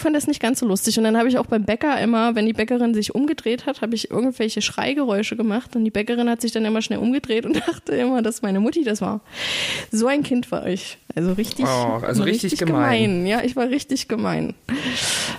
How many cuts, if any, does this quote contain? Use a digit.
1